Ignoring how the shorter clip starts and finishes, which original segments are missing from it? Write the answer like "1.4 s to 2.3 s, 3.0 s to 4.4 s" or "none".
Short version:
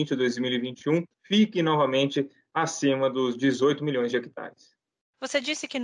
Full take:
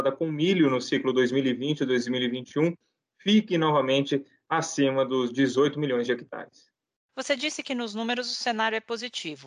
2.8 s to 3.1 s

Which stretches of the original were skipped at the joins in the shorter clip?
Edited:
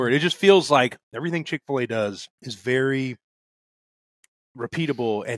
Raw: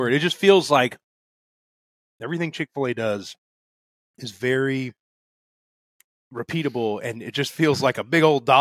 1.0 s to 2.1 s, 3.4 s to 4.1 s

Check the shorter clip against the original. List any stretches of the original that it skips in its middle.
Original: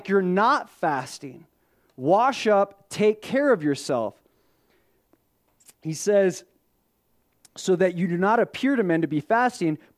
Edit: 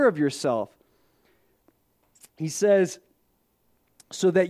none

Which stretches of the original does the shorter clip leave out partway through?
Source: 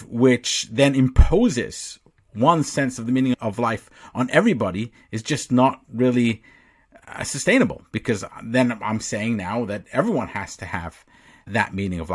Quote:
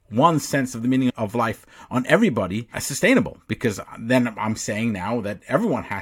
5.0 s to 7.2 s

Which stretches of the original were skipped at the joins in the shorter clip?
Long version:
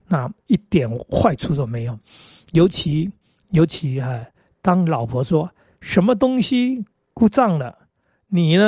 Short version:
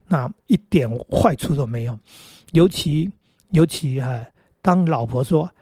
none

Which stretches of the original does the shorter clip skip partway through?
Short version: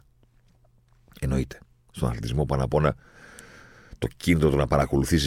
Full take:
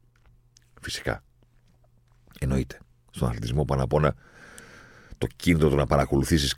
none

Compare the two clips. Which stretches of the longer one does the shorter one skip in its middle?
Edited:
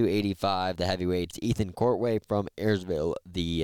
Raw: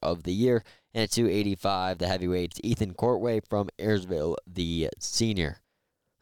none

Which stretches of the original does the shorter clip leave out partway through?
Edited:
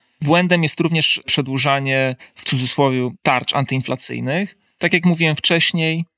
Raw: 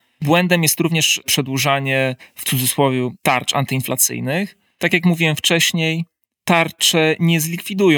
none

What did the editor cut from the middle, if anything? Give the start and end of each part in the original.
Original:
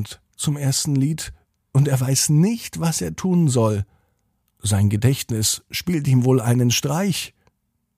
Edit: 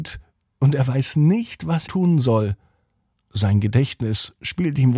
3.0 s to 3.2 s

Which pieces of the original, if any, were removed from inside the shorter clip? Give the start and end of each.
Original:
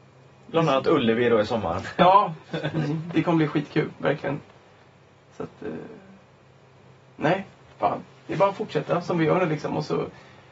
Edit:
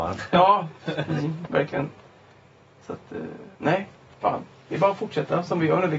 3.1 s to 4.0 s, 6.0 s to 7.1 s

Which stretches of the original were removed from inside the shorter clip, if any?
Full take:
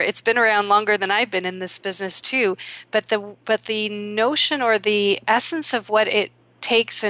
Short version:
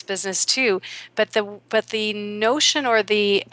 none

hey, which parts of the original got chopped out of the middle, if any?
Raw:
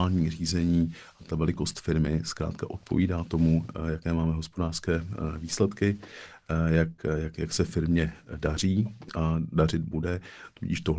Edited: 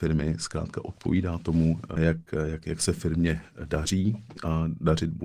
3.8 s to 6.7 s

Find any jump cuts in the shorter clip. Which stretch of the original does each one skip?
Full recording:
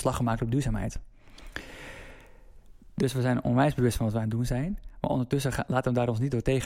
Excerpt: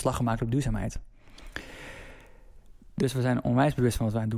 none

